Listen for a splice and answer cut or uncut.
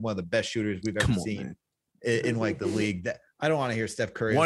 uncut